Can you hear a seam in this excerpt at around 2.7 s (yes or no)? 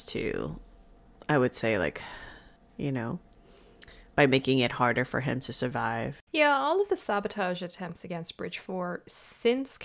yes